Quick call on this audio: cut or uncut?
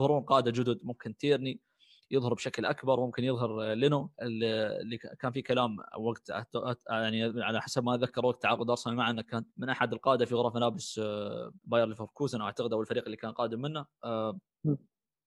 cut